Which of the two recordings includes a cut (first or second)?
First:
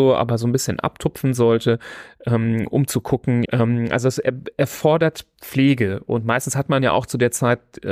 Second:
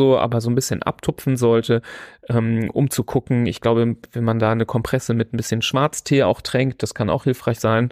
first